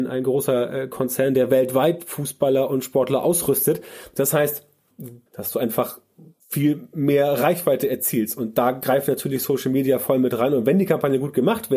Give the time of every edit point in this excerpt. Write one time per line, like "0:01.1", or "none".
0:05.3